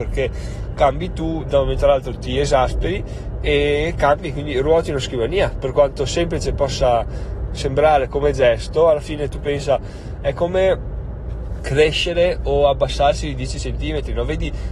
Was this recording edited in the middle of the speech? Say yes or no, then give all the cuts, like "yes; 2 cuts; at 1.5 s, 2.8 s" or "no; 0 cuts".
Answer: no; 0 cuts